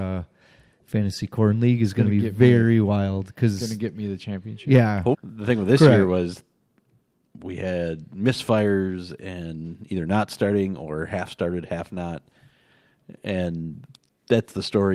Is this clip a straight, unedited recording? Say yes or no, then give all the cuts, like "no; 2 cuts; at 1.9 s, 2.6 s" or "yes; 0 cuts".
no; 1 cut; at 5.1 s